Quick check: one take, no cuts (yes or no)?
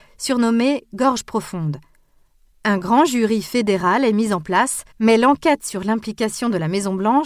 no